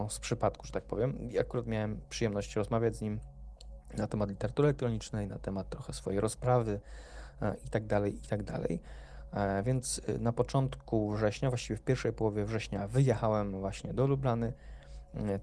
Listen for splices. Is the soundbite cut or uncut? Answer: uncut